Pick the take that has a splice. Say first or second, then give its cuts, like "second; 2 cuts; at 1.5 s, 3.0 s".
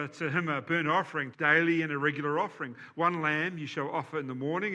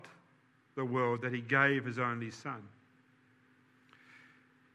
first; 1 cut; at 1.3 s